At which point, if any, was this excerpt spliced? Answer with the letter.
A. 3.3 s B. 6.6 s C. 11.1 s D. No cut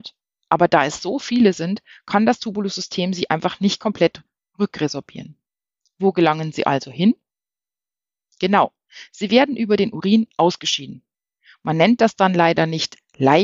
D